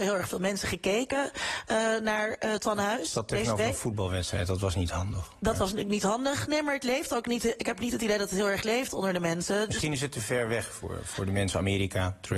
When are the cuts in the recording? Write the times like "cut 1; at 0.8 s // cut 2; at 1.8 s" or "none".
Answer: none